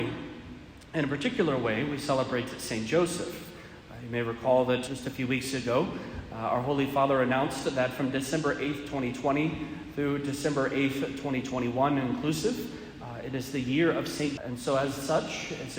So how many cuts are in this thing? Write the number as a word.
two